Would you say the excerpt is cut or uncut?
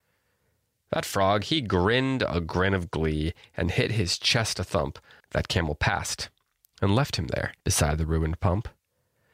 cut